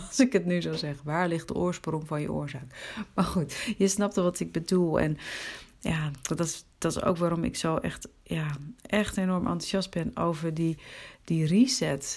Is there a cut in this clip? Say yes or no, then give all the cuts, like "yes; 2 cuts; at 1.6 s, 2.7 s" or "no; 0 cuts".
no; 0 cuts